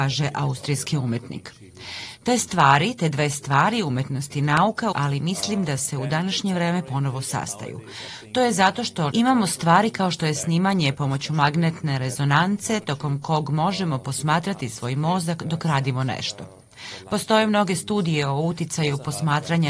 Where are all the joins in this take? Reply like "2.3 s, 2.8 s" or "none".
4.9 s, 9.1 s